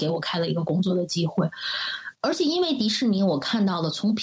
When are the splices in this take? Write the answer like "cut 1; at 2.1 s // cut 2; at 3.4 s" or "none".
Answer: cut 1; at 2.2 s